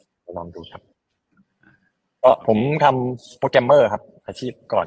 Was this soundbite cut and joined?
no; 0 cuts

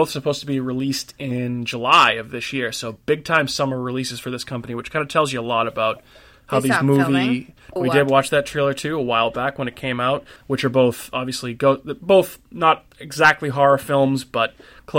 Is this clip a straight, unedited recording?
no; 2 cuts; at 7.8 s, 10.4 s

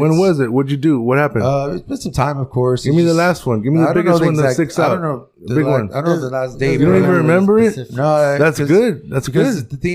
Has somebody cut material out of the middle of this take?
no; 0 cuts

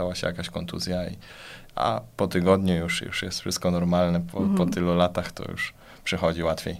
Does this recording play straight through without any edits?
yes; 0 cuts

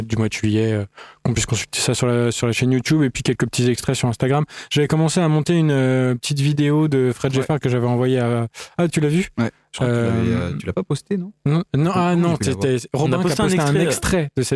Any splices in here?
no; 0 cuts

